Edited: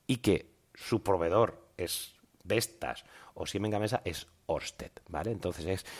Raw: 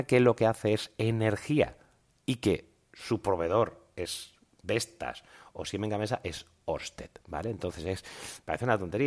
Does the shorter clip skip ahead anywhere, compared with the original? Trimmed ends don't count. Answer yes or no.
no